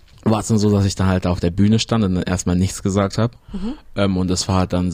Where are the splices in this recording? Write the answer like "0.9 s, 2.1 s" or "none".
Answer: 3.4 s